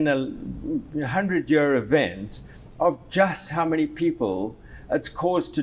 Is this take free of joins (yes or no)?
yes